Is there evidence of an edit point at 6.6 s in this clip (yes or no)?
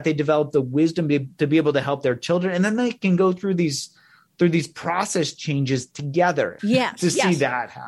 yes